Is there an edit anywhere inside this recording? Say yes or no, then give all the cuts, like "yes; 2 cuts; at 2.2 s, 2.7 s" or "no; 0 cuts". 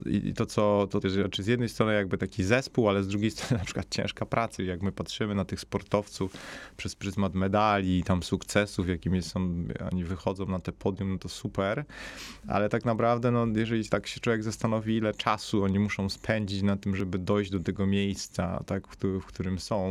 yes; 1 cut; at 1.0 s